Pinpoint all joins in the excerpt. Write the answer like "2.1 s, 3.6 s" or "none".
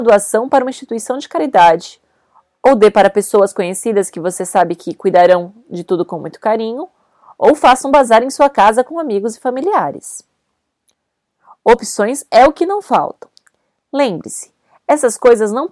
none

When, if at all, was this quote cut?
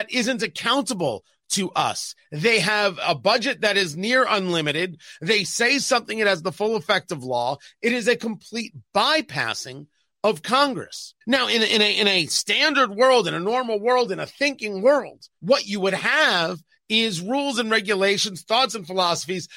11.2 s, 15.4 s

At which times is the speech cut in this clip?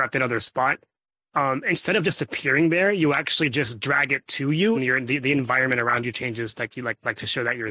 4.7 s

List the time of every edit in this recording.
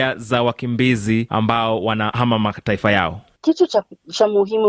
none

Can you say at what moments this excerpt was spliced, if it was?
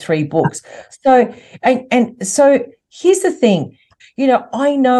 4.0 s

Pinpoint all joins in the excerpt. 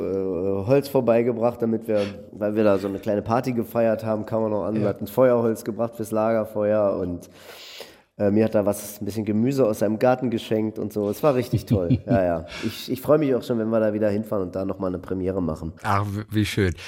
15.8 s

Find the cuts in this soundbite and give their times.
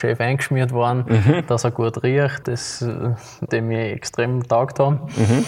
2.4 s, 3.5 s

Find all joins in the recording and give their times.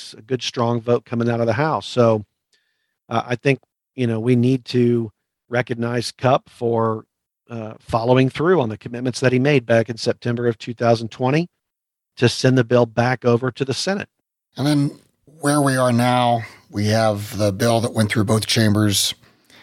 none

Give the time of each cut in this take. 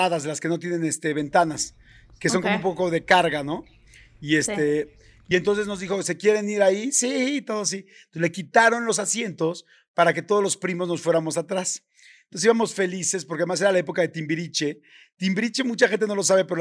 none

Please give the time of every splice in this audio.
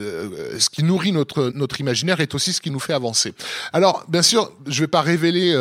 1.5 s, 3.7 s

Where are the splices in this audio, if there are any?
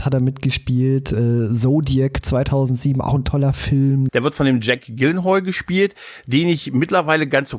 4.1 s

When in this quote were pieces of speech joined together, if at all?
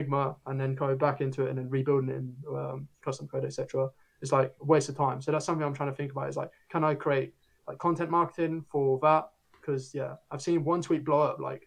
none

